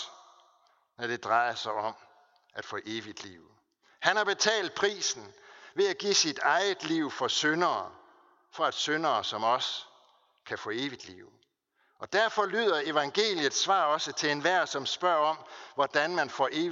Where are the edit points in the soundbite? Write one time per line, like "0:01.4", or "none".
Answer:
none